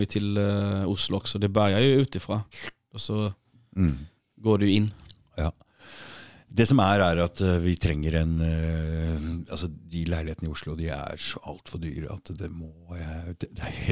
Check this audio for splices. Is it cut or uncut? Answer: uncut